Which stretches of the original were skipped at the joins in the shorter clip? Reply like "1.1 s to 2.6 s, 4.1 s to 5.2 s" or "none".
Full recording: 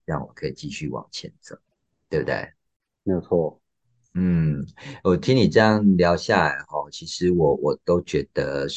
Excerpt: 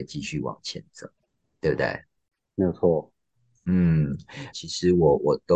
5.0 s to 6.9 s